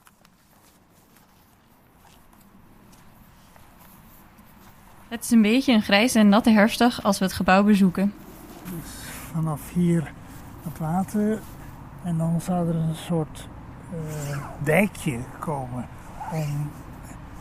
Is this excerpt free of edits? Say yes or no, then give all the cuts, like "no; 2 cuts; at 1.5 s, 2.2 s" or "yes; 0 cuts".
no; 1 cut; at 8.7 s